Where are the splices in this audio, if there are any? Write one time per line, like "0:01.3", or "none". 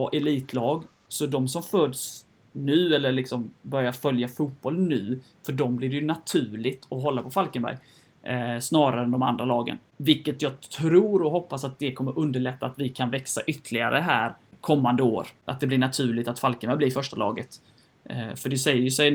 none